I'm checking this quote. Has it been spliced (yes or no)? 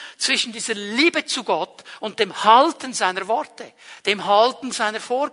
no